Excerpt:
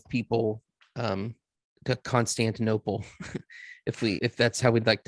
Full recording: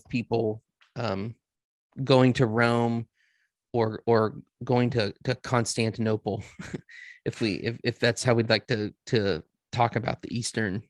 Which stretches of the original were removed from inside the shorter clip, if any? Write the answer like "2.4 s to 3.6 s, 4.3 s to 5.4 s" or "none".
1.8 s to 5.2 s, 7.6 s to 7.8 s